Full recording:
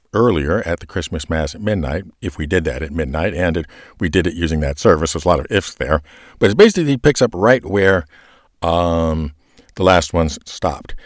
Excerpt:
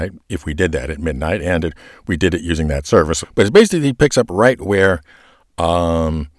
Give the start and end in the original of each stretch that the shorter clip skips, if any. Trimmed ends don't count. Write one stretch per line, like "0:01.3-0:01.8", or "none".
0:05.1-0:06.2